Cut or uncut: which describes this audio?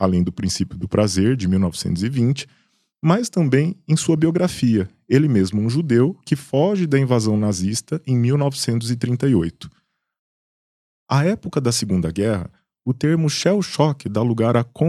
uncut